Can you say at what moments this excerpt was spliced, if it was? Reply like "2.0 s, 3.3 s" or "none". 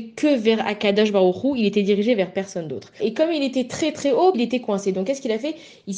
3.0 s, 4.3 s